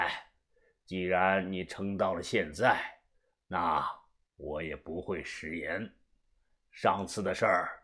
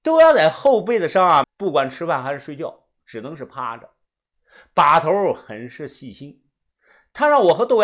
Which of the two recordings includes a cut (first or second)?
second